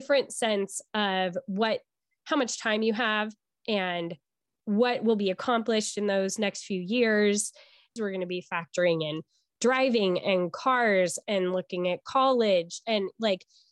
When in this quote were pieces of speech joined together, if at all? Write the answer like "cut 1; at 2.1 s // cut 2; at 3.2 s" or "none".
cut 1; at 8.0 s